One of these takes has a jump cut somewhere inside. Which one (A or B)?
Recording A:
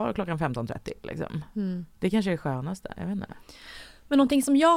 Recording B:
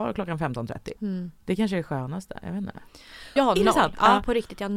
B